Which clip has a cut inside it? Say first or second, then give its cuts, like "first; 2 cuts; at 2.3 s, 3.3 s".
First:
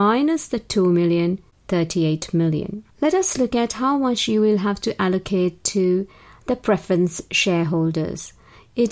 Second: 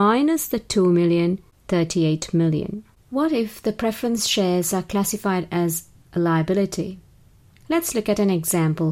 first; 1 cut; at 2.9 s